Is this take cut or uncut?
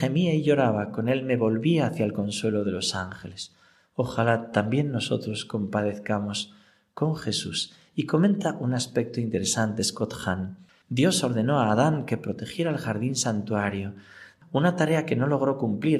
cut